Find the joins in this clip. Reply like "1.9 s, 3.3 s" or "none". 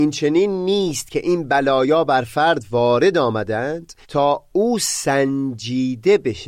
4.0 s

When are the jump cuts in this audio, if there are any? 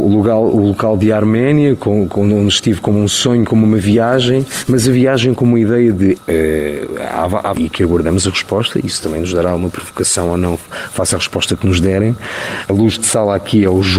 6.2 s, 7.5 s, 12.7 s

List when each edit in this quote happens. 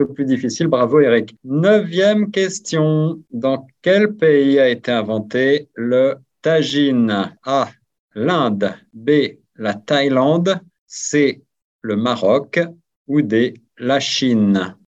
none

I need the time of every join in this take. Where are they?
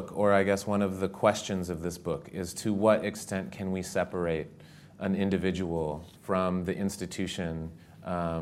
6.2 s

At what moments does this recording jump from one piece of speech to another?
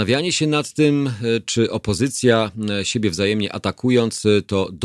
none

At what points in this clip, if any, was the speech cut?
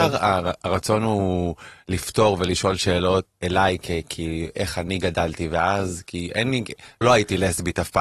3.3 s, 7.0 s

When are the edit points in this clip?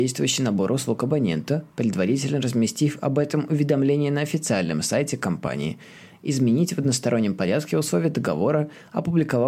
none

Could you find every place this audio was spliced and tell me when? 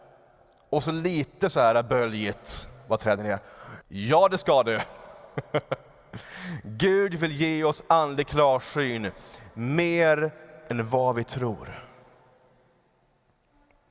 3.8 s

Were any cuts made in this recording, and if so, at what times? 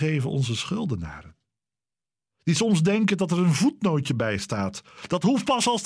none

